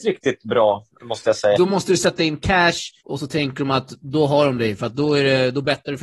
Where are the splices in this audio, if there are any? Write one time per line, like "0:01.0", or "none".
0:01.6
0:03.0